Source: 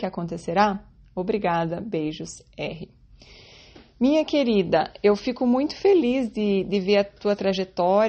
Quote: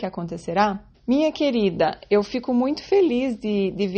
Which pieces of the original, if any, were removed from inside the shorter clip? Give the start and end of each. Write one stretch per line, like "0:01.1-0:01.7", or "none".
0:00.9-0:03.9